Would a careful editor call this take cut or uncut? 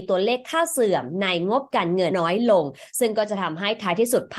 cut